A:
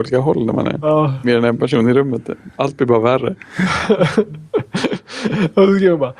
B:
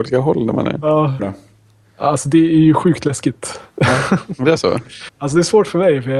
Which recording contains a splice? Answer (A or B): B